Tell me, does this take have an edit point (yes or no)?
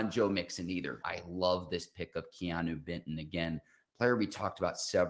yes